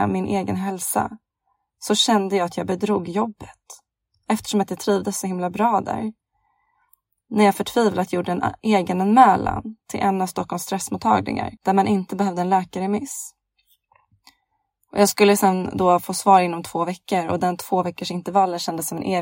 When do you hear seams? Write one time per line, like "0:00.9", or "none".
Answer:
0:11.6